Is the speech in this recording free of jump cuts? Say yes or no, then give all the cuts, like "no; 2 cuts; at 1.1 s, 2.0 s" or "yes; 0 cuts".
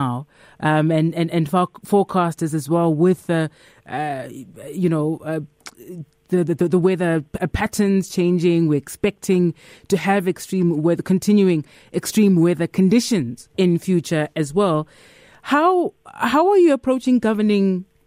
yes; 0 cuts